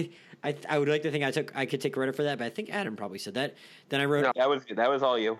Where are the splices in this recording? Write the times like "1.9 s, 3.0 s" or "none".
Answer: 4.3 s